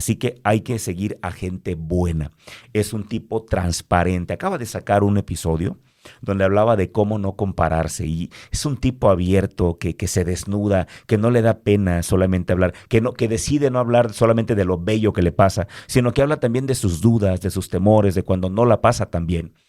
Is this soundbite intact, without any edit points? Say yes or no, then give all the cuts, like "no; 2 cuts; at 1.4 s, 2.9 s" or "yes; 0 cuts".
yes; 0 cuts